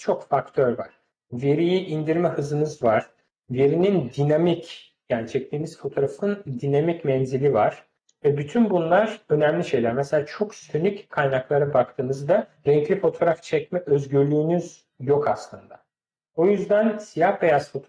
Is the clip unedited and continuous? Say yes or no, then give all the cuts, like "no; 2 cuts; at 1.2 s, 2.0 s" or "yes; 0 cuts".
yes; 0 cuts